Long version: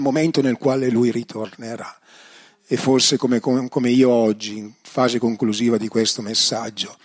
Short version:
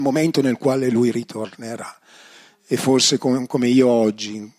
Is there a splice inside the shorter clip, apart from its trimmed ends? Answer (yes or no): yes